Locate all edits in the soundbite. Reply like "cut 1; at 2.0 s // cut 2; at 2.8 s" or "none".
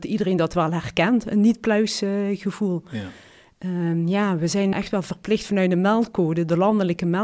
cut 1; at 4.7 s